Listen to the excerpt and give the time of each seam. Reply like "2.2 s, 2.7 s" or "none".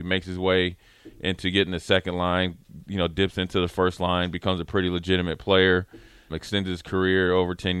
6.3 s